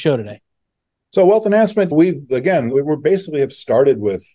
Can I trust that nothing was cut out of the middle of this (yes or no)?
no